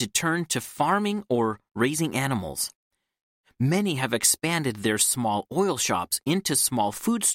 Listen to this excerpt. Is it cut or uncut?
uncut